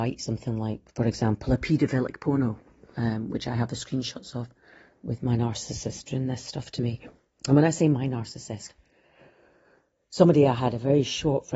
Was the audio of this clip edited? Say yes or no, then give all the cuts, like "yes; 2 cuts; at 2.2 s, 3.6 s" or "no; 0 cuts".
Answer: no; 0 cuts